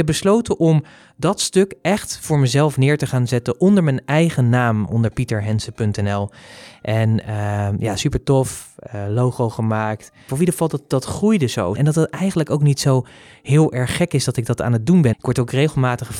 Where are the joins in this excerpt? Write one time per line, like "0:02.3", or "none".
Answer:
0:10.3
0:11.8
0:15.1